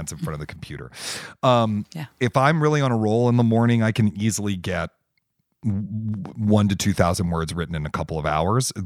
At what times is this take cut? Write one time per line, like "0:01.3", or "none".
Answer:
none